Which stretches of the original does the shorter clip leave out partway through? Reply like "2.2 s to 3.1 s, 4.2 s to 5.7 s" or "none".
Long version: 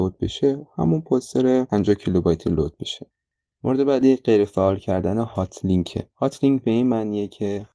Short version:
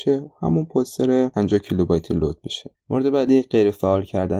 3.2 s to 3.5 s